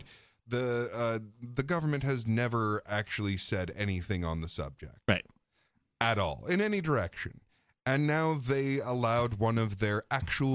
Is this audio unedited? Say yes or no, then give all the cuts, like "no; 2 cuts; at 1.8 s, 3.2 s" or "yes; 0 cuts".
yes; 0 cuts